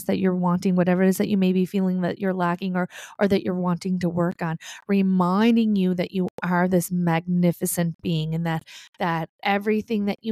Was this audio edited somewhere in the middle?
no; 0 cuts

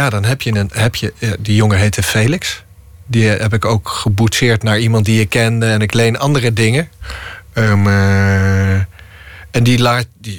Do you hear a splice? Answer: no; 0 cuts

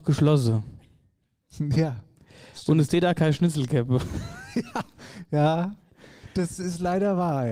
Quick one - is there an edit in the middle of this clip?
no; 0 cuts

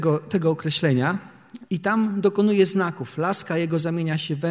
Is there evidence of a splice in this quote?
yes; 1 cut; at 1.7 s

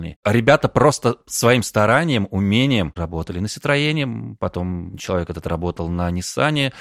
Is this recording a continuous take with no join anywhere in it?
no; 1 cut; at 3.0 s

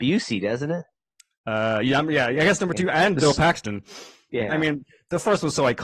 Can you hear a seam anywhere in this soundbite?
yes; 1 cut; at 4.5 s

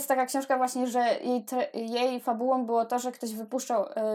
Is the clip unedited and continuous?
yes; 0 cuts

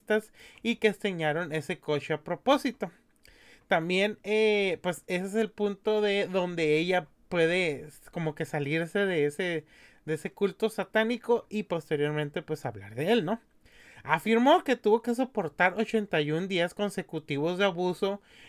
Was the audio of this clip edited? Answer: no; 0 cuts

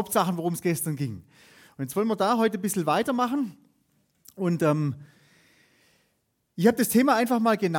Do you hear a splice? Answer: no; 0 cuts

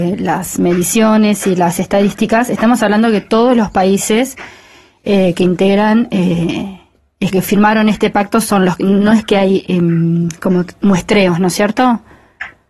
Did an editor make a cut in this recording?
yes; 1 cut; at 7.3 s

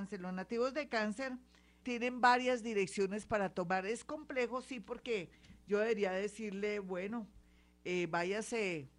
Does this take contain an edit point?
yes; 1 cut; at 1.8 s

